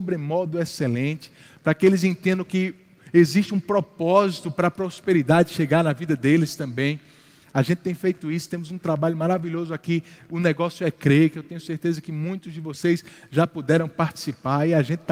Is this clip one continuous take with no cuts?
yes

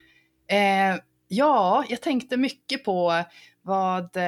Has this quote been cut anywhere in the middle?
no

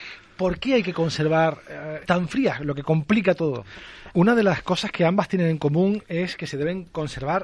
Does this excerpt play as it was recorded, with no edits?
no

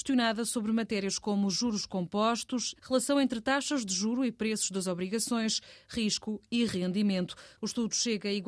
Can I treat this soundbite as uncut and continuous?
no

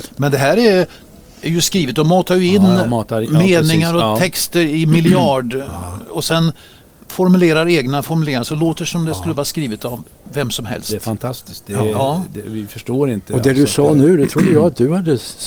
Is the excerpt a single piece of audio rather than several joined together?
yes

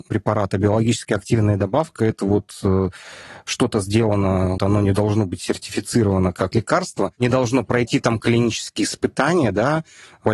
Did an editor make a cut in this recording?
yes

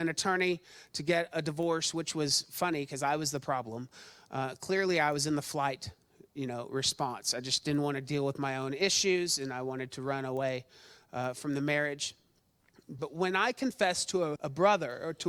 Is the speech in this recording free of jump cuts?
no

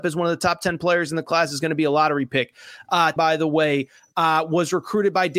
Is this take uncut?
no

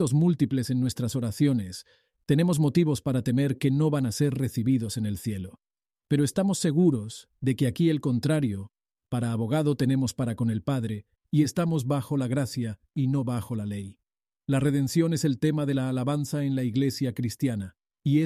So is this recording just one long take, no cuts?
yes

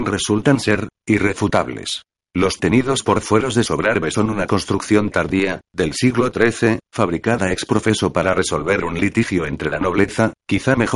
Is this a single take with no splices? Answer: no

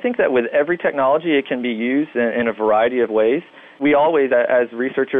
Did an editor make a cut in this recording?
no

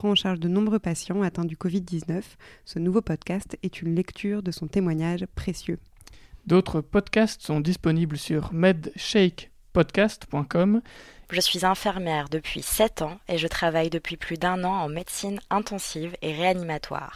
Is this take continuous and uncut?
no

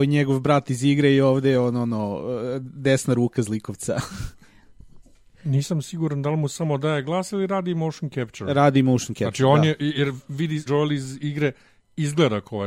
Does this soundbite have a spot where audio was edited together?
yes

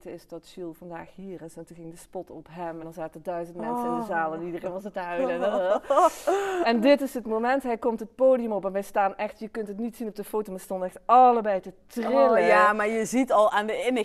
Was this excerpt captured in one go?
yes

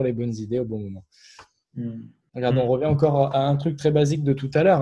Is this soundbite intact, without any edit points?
no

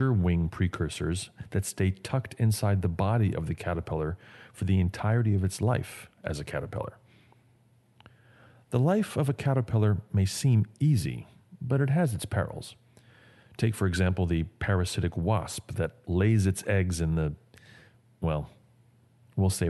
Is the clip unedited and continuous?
yes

